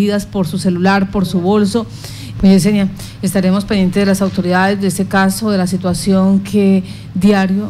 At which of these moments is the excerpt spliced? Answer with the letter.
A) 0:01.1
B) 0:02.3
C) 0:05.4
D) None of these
B